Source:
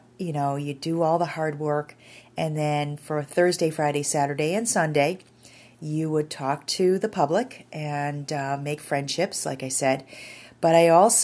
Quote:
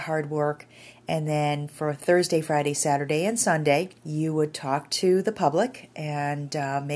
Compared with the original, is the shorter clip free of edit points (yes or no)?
no